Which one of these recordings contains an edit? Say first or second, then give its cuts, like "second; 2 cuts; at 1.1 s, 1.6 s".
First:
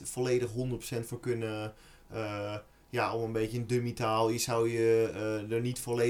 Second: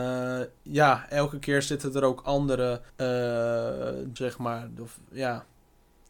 second; 2 cuts; at 2.9 s, 4.2 s